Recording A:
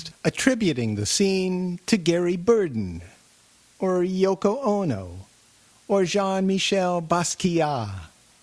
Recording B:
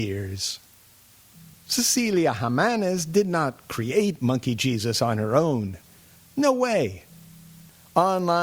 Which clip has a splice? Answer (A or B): B